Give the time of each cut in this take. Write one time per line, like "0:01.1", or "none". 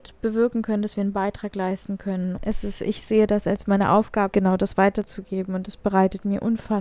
0:02.4
0:04.3